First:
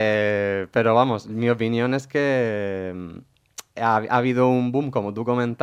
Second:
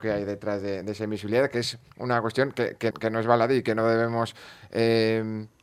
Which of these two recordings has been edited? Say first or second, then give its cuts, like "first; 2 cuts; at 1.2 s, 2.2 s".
second; 1 cut; at 2.9 s